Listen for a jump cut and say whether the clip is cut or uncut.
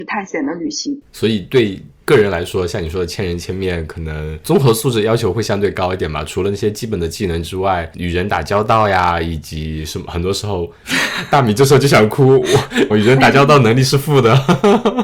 cut